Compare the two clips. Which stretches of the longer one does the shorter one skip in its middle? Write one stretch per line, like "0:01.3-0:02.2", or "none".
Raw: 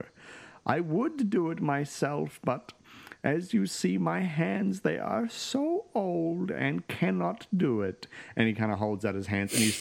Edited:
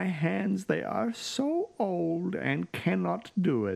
none